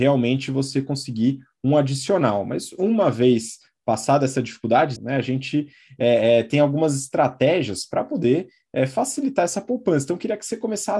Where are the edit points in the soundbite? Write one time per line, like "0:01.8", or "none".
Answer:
0:05.0